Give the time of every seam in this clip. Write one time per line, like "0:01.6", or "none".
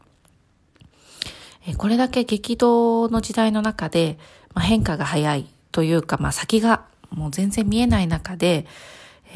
none